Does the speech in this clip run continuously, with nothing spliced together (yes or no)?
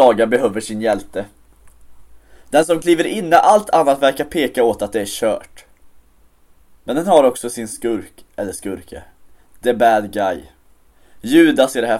yes